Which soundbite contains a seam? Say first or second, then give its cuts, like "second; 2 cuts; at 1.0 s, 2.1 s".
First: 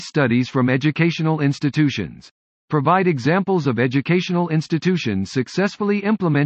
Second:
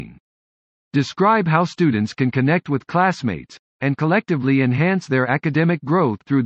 second; 1 cut; at 3.7 s